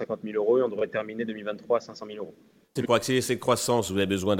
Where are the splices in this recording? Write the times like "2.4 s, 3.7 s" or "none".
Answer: 2.8 s